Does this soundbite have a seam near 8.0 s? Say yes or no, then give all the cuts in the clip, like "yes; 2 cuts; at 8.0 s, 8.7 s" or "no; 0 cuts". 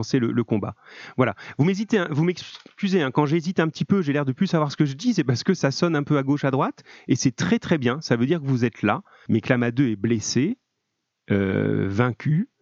no; 1 cut; at 9.3 s